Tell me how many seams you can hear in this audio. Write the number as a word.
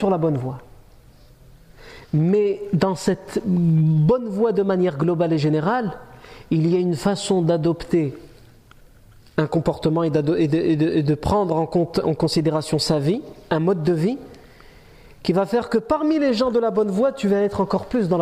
zero